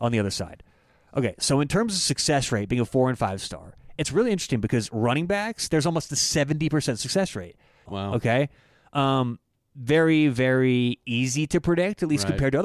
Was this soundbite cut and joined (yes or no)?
yes